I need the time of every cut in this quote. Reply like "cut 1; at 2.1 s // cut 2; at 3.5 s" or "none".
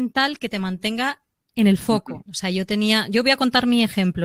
cut 1; at 2.3 s